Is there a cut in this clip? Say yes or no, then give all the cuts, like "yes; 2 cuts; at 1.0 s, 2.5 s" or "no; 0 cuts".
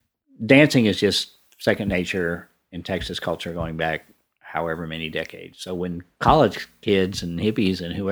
no; 0 cuts